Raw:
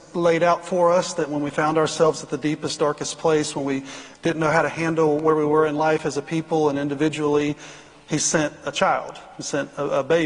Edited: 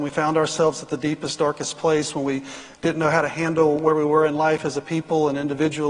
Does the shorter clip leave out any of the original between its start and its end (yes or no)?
no